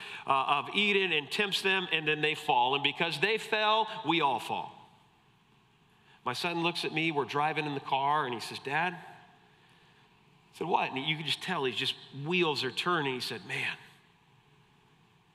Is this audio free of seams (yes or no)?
yes